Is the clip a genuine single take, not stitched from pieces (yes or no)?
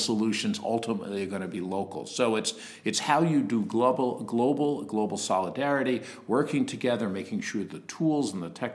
yes